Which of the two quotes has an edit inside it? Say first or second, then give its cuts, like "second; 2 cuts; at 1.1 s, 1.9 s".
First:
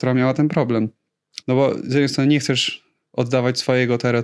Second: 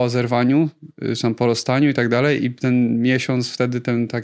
first; 1 cut; at 1.4 s